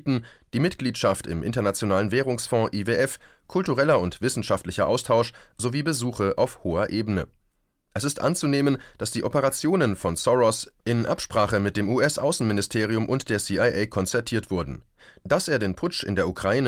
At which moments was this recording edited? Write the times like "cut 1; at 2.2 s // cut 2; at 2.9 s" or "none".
none

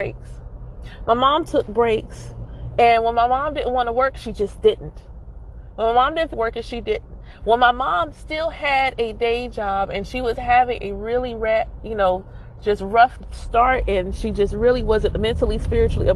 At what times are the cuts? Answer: cut 1; at 6.3 s

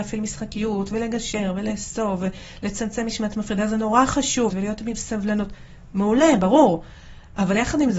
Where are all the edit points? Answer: cut 1; at 4.5 s

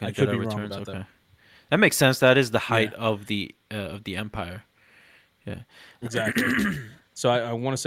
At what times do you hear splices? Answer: none

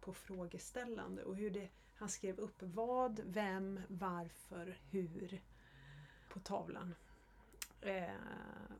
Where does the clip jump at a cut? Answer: cut 1; at 4.8 s // cut 2; at 6.3 s

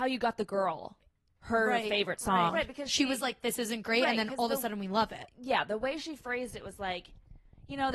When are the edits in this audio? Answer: cut 1; at 2.5 s

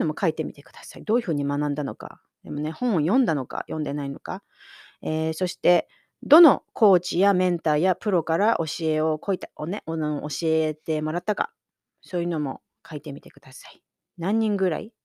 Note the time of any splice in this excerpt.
none

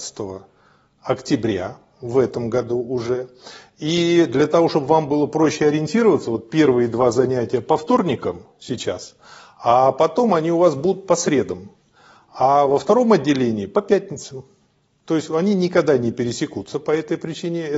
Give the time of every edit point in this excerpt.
none

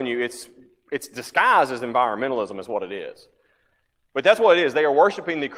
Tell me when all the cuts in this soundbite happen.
none

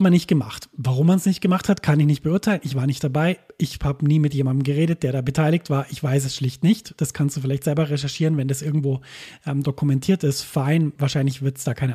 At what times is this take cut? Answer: none

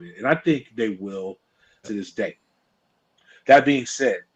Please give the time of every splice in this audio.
cut 1; at 1.8 s

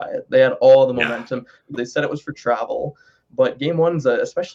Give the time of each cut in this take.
cut 1; at 1.7 s

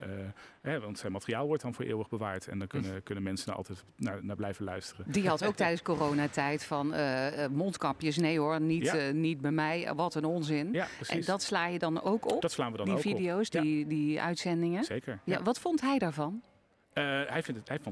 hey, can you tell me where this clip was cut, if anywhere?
none

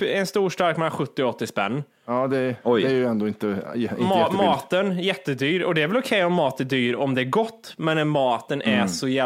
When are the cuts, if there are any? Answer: none

